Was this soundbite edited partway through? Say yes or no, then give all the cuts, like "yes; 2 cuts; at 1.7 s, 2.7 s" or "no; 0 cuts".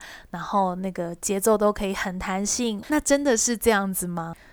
yes; 1 cut; at 2.8 s